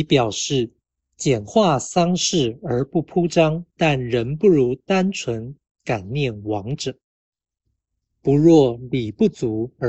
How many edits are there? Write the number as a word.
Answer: two